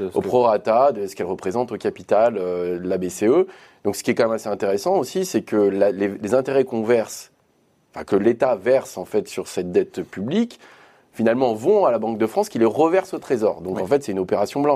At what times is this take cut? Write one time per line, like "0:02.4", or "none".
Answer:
none